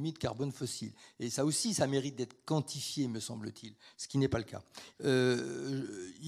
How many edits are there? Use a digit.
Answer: 1